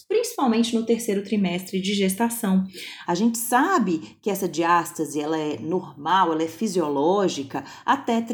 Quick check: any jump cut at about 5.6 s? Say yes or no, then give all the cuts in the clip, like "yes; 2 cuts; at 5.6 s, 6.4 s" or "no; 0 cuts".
no; 1 cut; at 3.0 s